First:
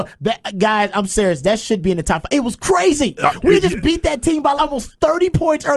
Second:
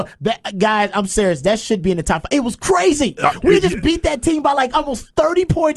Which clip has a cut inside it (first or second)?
first